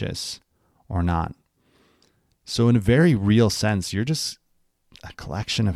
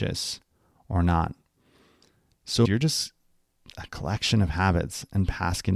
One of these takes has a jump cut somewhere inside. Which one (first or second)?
second